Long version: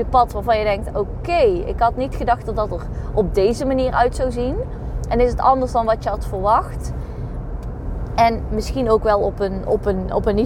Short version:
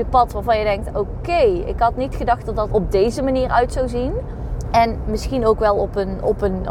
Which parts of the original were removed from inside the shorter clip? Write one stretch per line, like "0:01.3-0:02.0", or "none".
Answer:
0:02.7-0:03.1
0:05.1-0:08.1